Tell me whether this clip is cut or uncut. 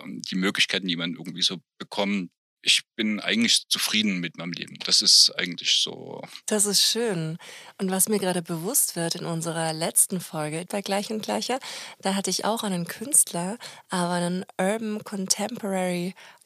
cut